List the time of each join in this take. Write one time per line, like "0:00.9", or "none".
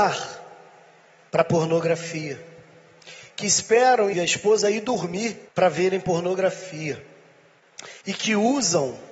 0:04.1
0:05.5
0:08.0